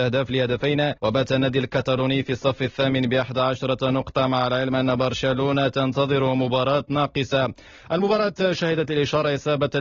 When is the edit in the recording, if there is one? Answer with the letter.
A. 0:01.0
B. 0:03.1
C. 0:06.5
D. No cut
A